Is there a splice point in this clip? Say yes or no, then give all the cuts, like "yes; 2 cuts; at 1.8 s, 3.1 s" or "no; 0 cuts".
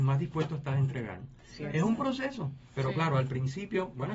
no; 0 cuts